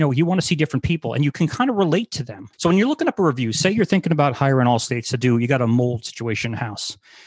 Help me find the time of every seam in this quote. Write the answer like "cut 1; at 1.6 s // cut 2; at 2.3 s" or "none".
cut 1; at 2.5 s